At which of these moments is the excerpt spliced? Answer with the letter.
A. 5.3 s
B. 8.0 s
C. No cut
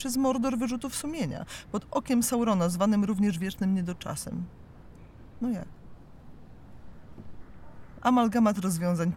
B